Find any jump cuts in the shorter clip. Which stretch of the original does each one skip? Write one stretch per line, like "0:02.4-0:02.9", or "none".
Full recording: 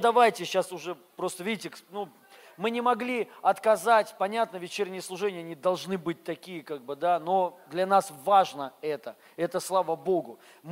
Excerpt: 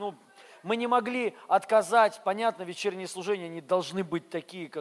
none